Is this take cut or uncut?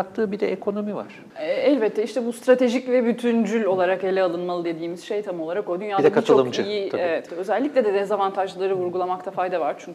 cut